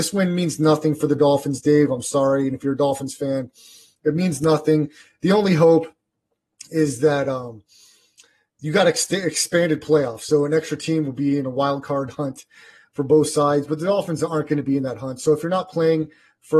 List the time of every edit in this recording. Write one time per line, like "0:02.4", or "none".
none

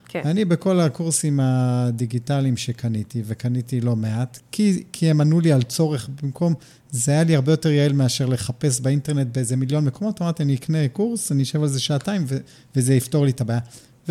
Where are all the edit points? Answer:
0:04.4

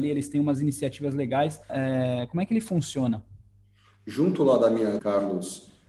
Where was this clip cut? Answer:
0:01.7
0:05.0

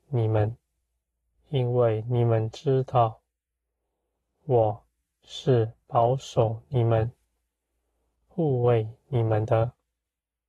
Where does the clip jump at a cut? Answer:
0:01.3

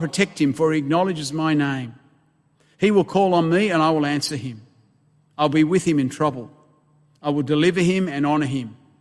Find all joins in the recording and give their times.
none

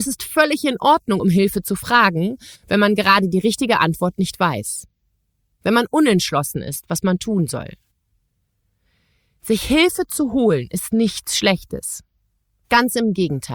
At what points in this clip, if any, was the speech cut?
none

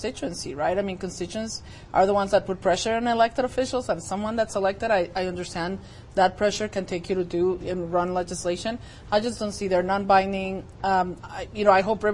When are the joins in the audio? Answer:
none

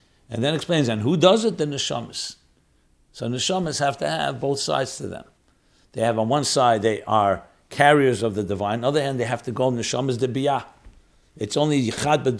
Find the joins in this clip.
none

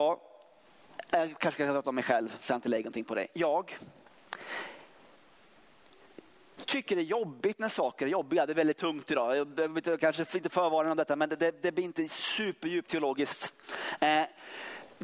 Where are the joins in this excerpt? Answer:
none

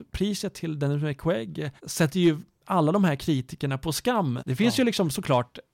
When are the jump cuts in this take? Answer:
0:01.8
0:04.4

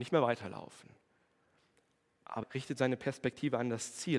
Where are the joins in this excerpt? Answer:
0:02.4

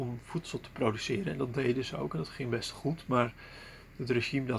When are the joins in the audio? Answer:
none

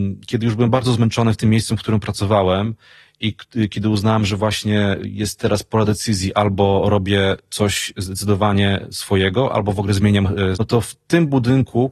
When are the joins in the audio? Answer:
0:10.5

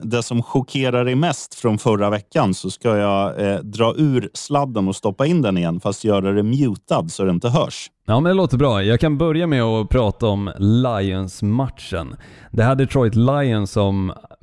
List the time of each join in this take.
none

